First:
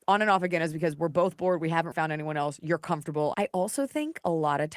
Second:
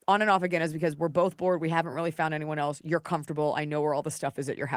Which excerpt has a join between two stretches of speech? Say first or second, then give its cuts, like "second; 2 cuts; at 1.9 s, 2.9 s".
first; 2 cuts; at 1.9 s, 3.3 s